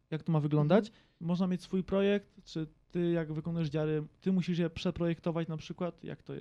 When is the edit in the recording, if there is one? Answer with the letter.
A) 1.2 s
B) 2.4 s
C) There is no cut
A